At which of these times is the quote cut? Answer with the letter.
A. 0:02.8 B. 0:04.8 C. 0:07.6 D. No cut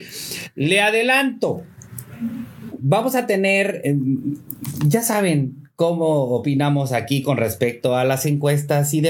D